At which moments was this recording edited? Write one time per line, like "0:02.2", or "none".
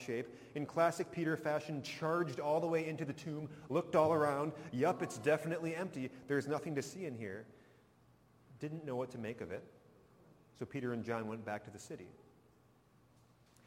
none